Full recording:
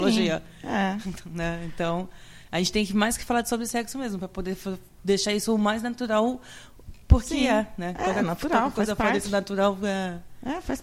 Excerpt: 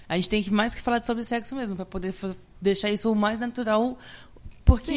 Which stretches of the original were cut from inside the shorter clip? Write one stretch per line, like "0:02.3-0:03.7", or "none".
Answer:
none